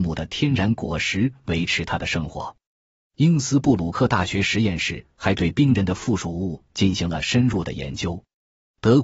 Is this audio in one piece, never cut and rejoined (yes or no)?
yes